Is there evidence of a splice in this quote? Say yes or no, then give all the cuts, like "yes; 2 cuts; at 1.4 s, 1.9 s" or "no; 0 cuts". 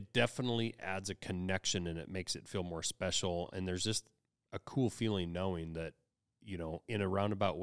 no; 0 cuts